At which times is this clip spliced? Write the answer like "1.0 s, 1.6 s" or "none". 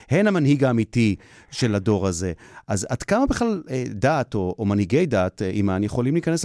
none